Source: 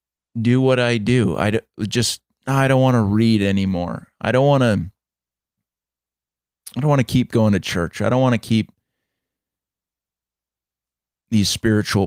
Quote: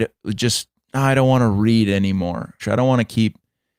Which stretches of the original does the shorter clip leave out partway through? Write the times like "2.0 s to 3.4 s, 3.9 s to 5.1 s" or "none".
4.1 s to 7.9 s